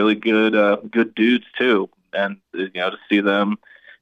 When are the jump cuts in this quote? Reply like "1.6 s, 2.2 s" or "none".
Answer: none